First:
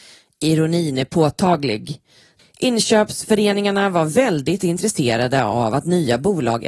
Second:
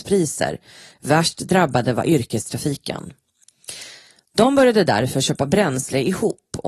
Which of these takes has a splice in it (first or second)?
first